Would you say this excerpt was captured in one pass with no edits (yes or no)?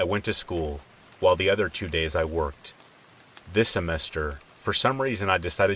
yes